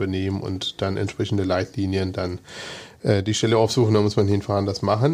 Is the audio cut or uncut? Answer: uncut